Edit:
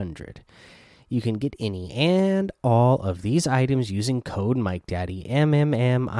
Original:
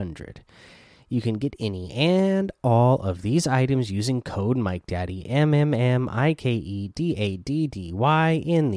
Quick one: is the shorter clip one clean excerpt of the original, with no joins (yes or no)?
yes